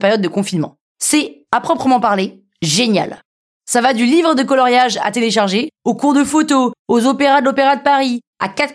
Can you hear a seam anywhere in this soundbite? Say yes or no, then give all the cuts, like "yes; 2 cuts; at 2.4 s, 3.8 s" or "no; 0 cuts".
yes; 1 cut; at 0.9 s